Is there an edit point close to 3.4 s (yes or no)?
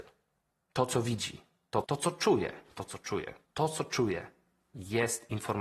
yes